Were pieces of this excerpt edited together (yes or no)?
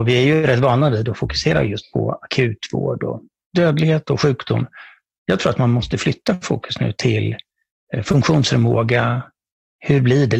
no